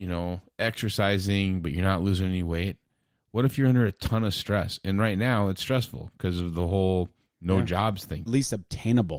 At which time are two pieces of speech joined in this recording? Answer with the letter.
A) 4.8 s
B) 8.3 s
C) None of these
B